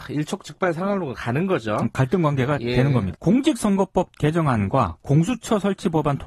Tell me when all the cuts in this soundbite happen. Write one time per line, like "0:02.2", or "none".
0:03.1